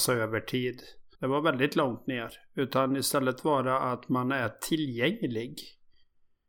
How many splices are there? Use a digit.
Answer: 1